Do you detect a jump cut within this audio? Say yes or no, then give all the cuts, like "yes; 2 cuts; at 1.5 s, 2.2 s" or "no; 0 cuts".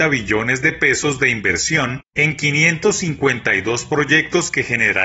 no; 0 cuts